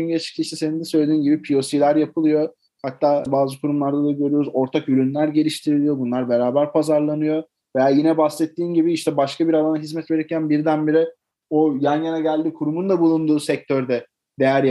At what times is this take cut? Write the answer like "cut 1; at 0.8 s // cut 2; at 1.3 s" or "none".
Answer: none